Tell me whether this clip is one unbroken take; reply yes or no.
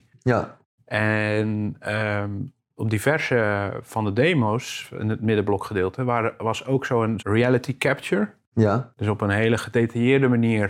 no